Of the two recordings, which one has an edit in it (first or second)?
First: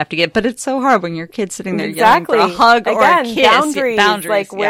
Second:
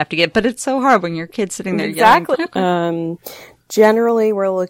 second